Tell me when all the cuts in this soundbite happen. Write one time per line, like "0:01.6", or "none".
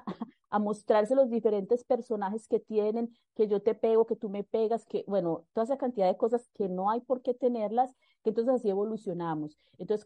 0:04.9